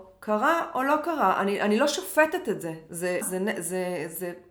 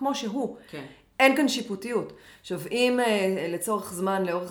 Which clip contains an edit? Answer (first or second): first